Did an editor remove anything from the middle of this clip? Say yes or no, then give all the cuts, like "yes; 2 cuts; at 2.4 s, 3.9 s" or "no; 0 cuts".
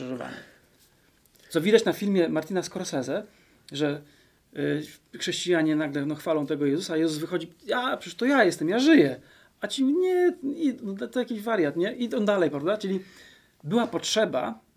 no; 0 cuts